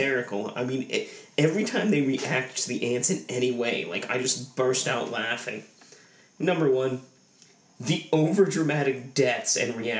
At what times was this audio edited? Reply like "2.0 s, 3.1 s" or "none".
none

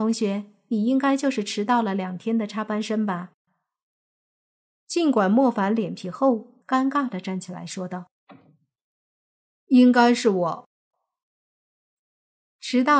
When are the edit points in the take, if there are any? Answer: 6.6 s

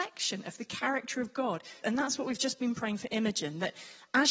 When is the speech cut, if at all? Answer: 1.8 s

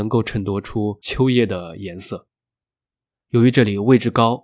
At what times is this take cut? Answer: 3.2 s

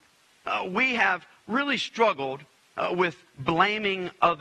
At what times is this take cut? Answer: none

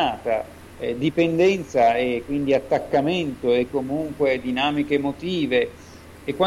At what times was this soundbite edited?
3.7 s

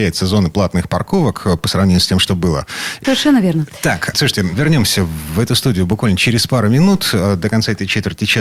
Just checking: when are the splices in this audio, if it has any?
3.0 s, 4.1 s

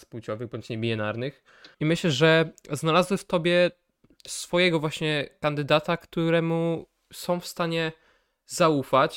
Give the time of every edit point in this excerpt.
1.7 s

